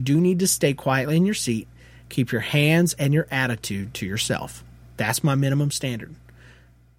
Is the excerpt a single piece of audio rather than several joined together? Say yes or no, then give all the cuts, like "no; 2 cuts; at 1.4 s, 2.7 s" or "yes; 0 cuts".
yes; 0 cuts